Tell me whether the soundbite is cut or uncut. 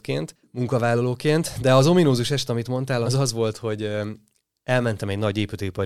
cut